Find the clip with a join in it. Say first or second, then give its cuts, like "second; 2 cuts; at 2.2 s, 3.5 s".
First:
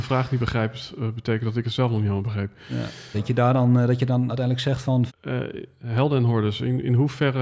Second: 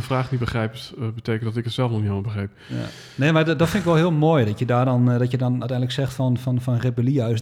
first; 2 cuts; at 3.1 s, 5.1 s